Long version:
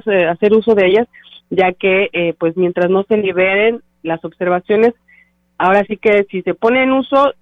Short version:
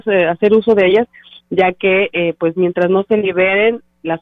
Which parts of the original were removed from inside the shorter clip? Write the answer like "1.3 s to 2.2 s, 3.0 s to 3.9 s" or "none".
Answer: none